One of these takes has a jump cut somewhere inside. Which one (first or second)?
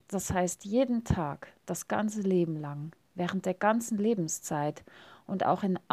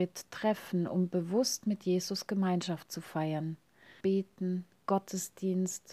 second